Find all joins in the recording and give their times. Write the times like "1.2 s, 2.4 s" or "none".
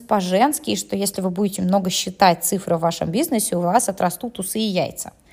1.6 s